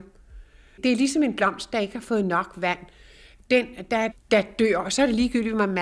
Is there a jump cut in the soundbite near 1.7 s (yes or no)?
no